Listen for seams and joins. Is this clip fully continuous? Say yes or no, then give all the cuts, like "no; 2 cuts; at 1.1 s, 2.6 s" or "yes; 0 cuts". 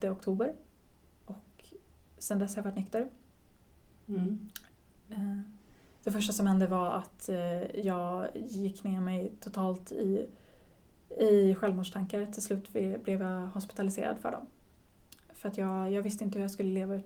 yes; 0 cuts